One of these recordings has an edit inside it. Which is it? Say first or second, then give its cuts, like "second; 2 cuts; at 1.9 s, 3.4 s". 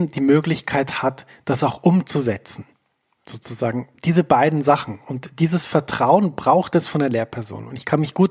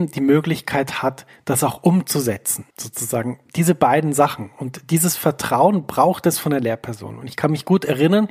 second; 1 cut; at 2.7 s